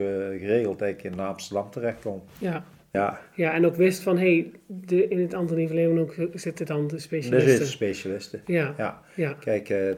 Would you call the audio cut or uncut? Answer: cut